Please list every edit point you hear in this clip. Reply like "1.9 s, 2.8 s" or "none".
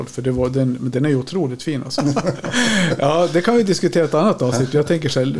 2.0 s

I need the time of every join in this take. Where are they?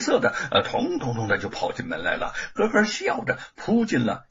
1.0 s

